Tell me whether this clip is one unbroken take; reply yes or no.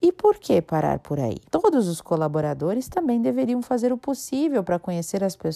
no